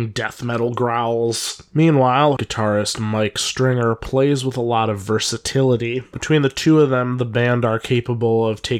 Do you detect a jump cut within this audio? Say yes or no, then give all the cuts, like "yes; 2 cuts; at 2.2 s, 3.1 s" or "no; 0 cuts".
yes; 1 cut; at 2.4 s